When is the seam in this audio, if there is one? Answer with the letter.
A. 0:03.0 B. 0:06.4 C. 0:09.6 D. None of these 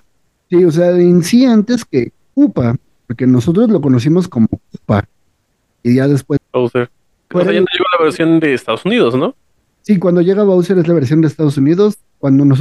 B